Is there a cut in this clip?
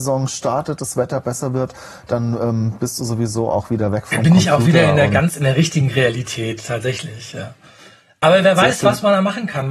no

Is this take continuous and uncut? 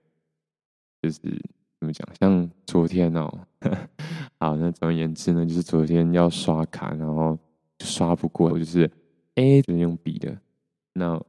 no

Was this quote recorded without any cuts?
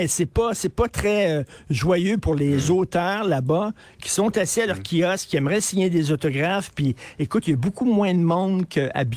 yes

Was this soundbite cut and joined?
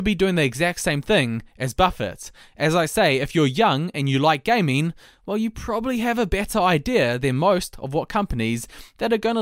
no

